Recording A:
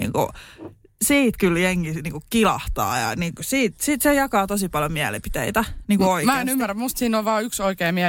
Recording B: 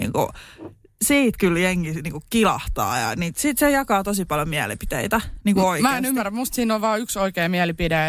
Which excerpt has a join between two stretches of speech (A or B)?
B